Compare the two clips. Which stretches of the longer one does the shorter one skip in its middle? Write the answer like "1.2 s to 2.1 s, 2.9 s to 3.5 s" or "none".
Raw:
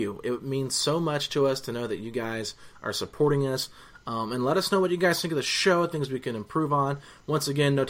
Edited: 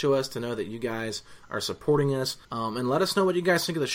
3.8 s to 4.0 s